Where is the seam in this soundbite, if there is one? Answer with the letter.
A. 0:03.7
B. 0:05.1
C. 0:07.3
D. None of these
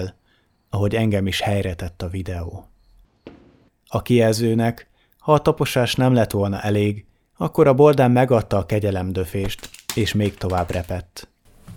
A